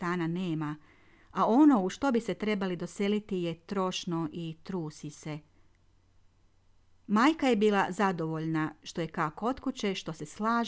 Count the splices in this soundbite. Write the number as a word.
zero